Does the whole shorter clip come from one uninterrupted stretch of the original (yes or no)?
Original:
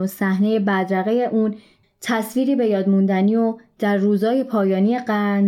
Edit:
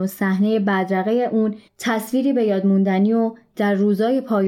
no